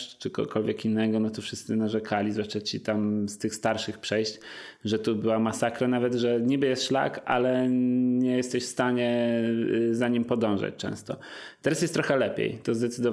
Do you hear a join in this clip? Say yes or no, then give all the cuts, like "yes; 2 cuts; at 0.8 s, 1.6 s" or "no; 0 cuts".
no; 0 cuts